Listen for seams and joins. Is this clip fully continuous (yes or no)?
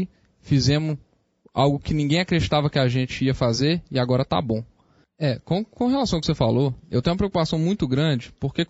no